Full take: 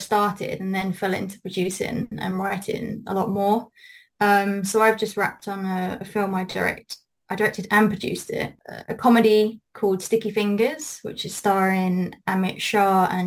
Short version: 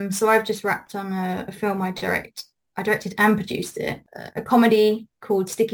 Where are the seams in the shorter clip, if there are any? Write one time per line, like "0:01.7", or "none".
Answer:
none